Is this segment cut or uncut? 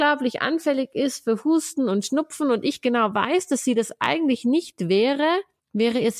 uncut